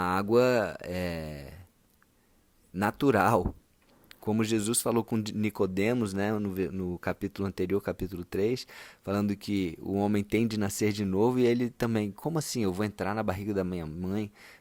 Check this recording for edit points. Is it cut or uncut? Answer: uncut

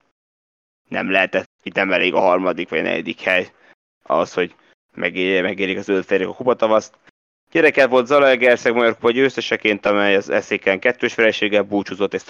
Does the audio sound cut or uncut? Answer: cut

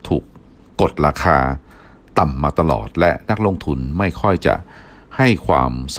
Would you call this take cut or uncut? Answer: uncut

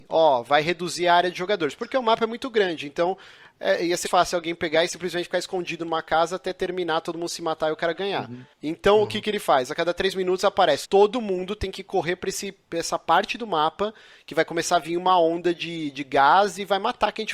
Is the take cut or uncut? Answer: cut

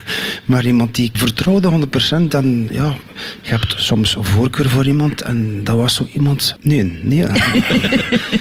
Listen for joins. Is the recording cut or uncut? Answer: cut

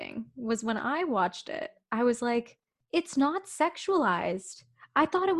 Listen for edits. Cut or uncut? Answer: uncut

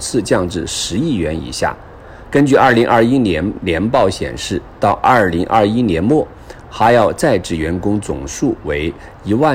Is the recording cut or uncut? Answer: cut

